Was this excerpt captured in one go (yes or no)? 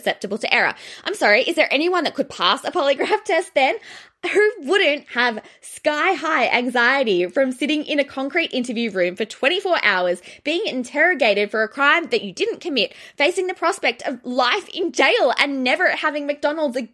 yes